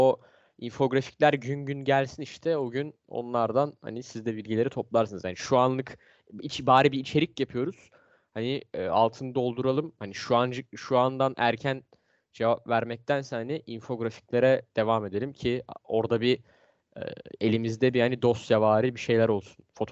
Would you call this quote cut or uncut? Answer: uncut